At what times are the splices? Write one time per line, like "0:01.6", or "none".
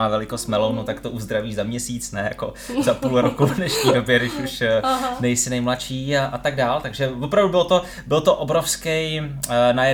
none